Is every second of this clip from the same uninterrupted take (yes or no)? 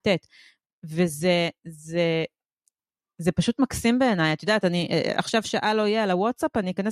yes